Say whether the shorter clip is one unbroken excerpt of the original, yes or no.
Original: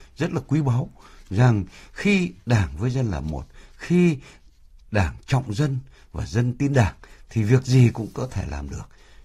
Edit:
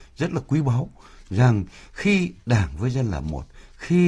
yes